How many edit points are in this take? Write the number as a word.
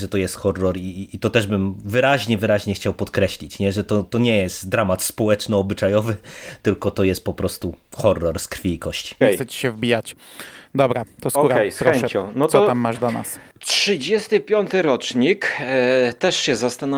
one